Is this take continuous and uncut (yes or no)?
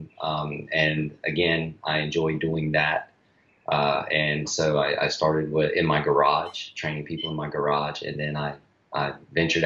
yes